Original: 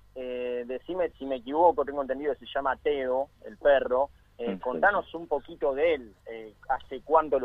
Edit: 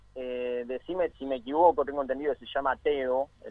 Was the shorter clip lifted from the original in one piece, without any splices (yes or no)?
yes